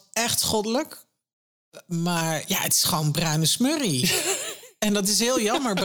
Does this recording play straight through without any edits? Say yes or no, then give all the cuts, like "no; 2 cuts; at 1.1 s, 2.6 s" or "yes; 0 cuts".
yes; 0 cuts